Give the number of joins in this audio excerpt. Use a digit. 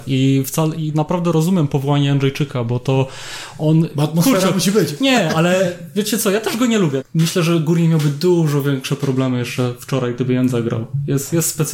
1